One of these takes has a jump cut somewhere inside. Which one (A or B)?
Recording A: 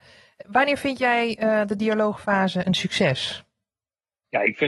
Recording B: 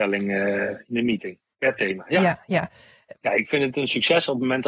B